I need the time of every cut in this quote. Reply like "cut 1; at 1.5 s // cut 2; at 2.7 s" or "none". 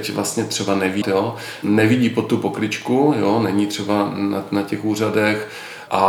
cut 1; at 1.0 s